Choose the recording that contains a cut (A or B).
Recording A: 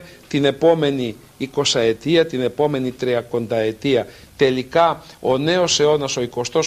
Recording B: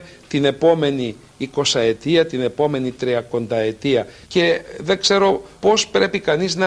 B